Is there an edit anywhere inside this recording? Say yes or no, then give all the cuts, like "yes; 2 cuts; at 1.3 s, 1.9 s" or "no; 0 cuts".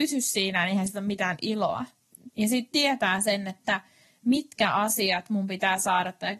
yes; 1 cut; at 2.3 s